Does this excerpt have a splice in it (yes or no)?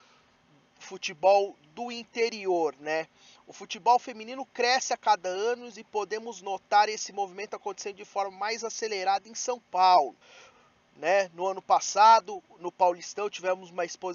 no